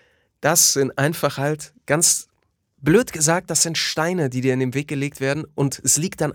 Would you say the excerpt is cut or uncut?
uncut